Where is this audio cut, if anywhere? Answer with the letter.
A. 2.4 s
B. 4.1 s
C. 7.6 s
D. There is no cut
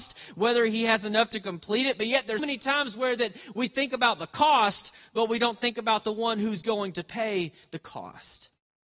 A